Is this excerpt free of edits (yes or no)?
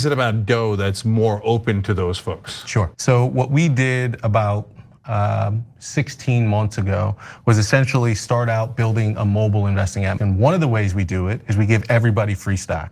no